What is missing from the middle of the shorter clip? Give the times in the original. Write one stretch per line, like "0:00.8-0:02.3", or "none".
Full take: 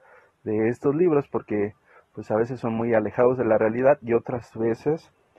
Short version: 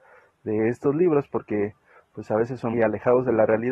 0:02.7-0:02.8